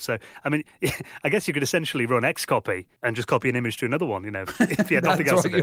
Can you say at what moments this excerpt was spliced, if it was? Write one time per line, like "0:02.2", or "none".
0:03.0